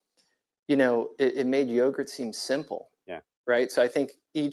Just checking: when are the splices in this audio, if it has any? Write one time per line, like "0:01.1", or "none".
0:03.0